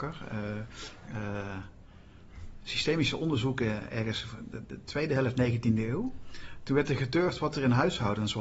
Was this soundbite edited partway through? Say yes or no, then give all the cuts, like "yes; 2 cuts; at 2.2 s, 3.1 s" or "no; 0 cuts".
yes; 1 cut; at 1.1 s